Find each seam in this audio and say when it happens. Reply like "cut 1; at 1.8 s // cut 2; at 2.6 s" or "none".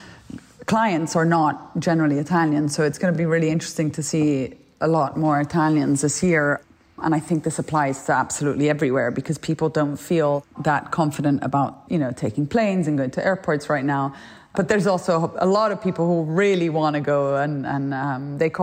none